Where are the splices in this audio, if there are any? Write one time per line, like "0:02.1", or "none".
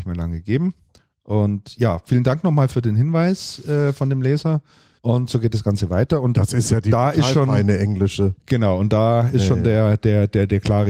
0:05.0